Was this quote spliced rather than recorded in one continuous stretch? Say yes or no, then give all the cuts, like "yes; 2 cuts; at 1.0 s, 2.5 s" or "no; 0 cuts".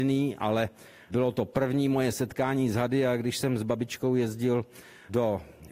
no; 0 cuts